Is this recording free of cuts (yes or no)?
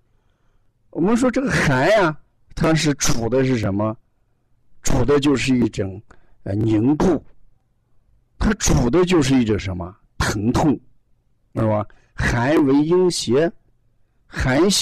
yes